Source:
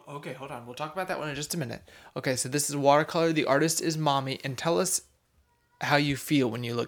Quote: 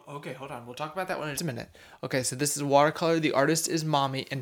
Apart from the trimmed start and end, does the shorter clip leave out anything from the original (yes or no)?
yes